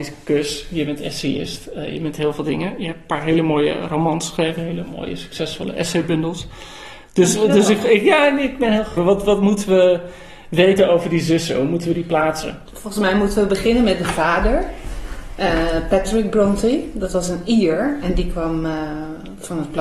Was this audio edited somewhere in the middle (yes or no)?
yes